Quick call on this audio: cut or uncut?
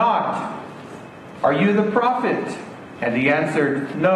uncut